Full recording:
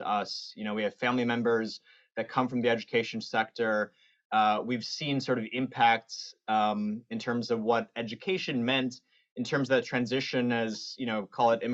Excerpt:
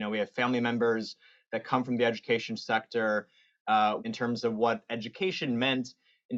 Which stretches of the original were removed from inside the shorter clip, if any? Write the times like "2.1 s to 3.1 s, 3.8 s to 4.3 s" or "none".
4.6 s to 7.1 s